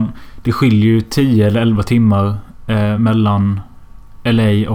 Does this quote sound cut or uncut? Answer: uncut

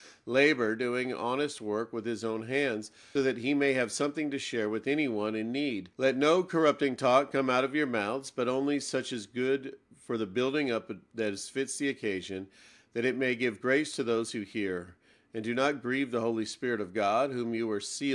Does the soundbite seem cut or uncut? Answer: cut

